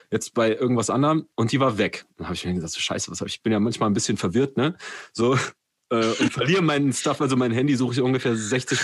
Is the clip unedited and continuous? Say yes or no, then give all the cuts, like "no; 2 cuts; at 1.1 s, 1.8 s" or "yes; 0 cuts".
no; 1 cut; at 3.4 s